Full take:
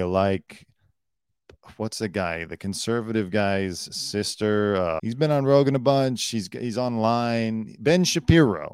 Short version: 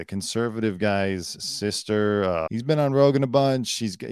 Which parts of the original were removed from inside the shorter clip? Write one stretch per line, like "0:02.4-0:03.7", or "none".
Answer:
none

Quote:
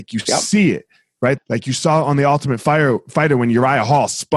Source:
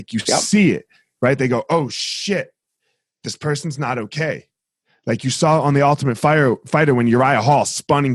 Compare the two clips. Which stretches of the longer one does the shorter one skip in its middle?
0:01.4-0:04.9

